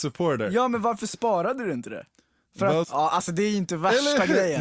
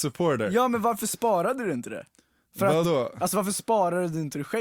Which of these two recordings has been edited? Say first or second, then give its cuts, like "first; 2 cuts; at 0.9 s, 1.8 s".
first; 1 cut; at 2.8 s